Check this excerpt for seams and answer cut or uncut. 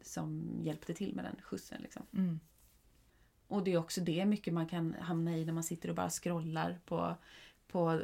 uncut